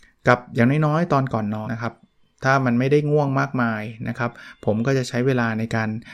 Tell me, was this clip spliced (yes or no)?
yes